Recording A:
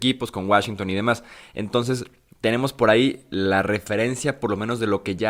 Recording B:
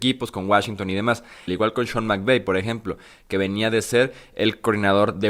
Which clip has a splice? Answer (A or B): B